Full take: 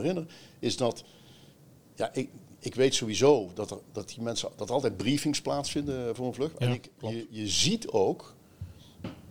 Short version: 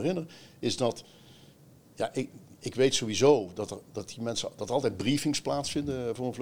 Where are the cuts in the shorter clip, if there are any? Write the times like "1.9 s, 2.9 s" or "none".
none